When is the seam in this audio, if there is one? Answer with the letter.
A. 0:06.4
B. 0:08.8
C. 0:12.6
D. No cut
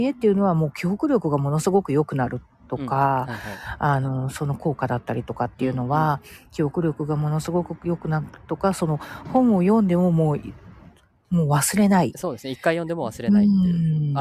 D